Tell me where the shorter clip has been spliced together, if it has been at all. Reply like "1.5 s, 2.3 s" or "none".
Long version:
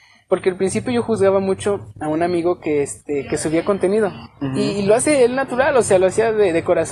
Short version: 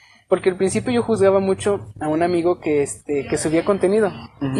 none